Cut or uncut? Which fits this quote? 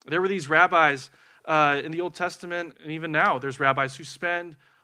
cut